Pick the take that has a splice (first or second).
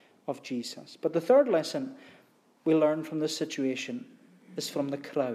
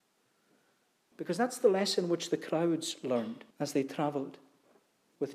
second